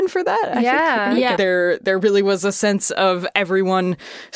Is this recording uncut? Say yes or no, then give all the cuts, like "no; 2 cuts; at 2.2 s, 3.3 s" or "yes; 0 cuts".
no; 1 cut; at 1.4 s